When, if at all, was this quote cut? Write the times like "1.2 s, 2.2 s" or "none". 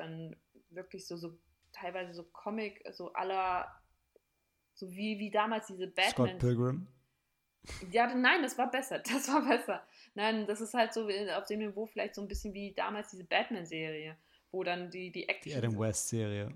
none